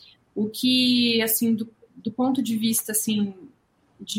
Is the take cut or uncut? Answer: uncut